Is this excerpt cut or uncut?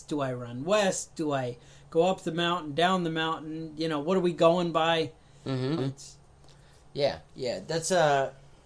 cut